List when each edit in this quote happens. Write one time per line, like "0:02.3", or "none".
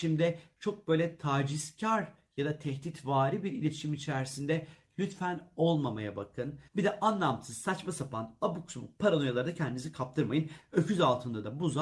0:06.7